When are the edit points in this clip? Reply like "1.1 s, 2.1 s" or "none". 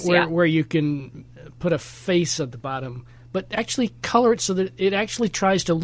none